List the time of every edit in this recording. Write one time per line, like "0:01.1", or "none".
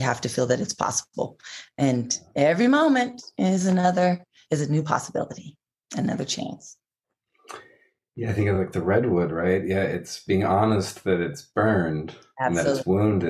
none